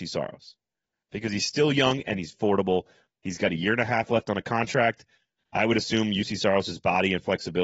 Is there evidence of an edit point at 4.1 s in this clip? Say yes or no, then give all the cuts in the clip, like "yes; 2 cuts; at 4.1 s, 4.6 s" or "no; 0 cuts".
no; 2 cuts; at 2.3 s, 5.4 s